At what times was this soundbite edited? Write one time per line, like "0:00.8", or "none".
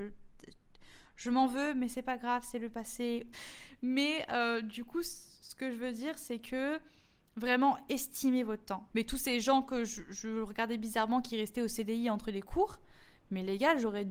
0:03.3
0:08.9

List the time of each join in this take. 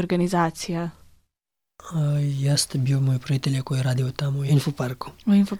none

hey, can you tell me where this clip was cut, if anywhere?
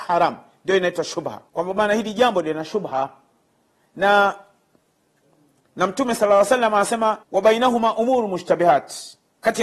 0:01.5
0:07.2

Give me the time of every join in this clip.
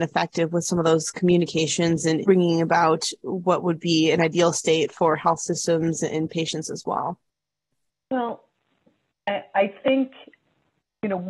0:02.2

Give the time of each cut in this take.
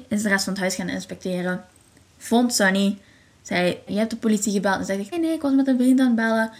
0:03.9
0:05.1

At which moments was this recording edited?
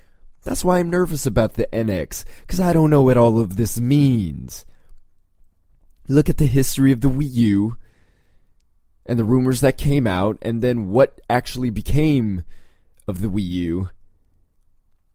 none

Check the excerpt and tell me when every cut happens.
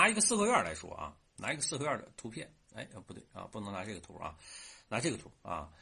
none

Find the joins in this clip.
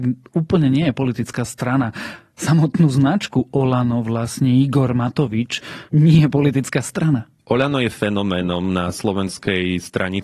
0:05.9

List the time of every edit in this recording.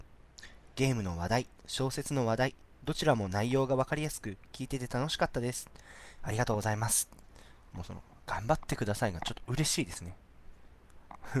0:06.2

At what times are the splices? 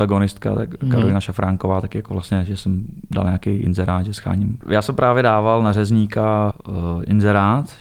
0:04.6
0:06.5

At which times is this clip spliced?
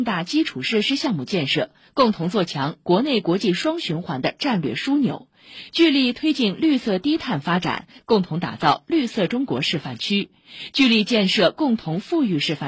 none

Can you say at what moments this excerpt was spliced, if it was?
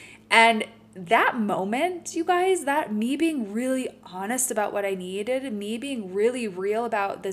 none

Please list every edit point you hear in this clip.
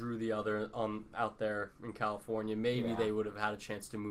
none

